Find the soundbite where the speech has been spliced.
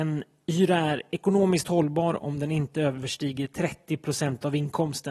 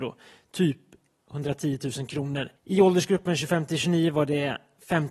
second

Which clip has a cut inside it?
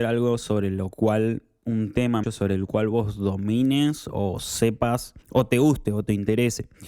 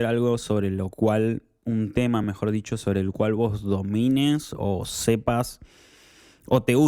first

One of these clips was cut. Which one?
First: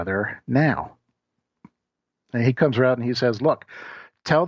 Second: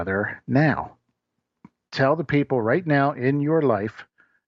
second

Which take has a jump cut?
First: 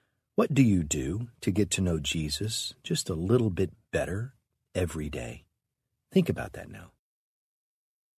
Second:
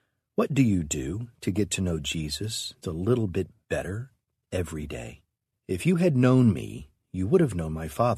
second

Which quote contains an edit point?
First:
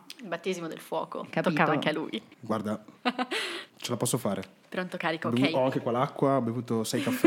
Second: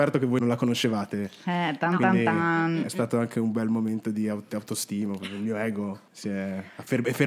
first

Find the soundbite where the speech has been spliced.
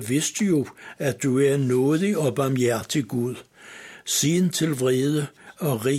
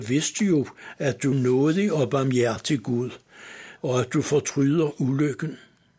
second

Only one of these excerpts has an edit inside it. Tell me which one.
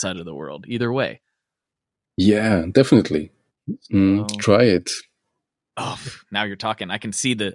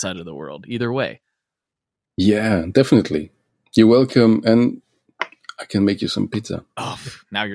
first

